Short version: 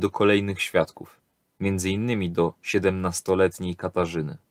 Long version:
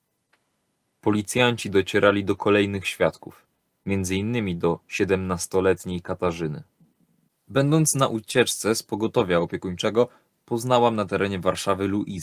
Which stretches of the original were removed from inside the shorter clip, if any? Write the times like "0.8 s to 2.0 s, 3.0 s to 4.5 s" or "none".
none

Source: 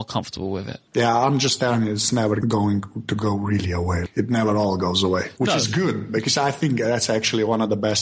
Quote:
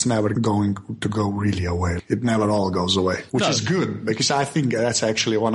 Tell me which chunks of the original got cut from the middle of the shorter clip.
none

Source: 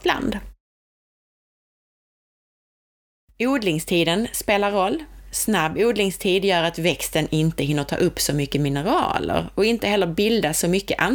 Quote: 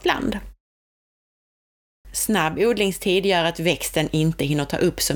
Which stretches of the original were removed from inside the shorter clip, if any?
2.0 s to 5.2 s

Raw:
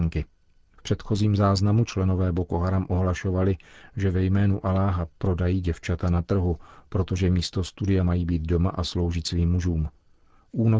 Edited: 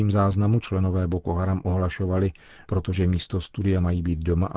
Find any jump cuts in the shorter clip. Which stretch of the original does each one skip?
3.9 s to 6.9 s

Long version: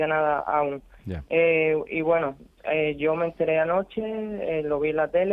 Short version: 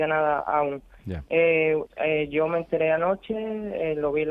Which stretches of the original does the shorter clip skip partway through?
1.9 s to 2.5 s

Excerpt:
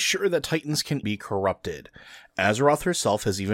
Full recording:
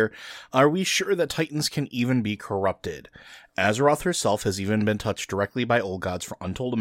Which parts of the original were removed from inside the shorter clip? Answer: 1.9 s to 2.2 s

